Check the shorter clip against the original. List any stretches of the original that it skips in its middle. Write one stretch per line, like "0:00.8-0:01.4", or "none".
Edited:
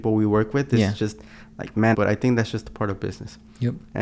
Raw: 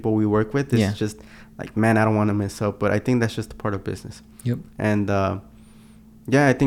0:01.9-0:02.8

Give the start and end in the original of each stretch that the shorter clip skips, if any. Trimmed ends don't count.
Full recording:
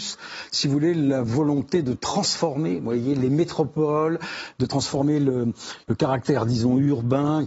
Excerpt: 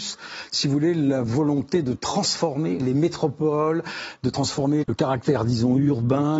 0:02.8-0:03.1
0:05.2-0:05.8

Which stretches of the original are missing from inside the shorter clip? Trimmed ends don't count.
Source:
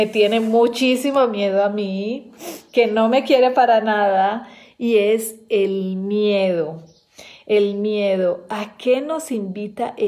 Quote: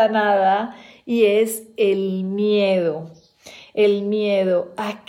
none

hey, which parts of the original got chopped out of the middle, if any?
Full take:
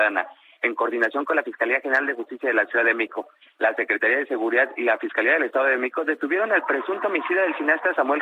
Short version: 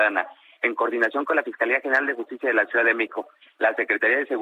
none

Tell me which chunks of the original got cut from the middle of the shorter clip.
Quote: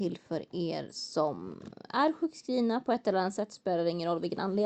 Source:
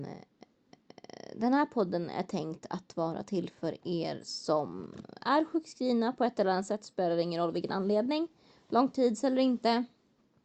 none

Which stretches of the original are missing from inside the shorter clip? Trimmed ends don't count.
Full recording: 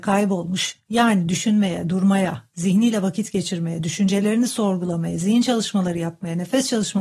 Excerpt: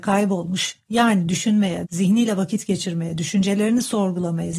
0:01.8-0:02.5

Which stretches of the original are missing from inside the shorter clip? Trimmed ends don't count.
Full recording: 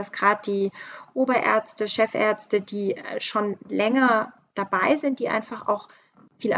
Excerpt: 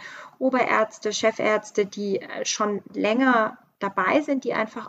none

